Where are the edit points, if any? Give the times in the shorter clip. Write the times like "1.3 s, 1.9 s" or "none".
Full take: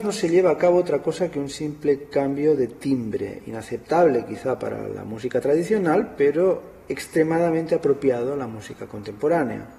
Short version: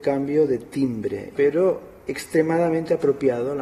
1.4 s